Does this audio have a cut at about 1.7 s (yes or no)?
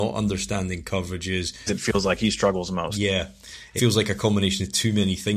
yes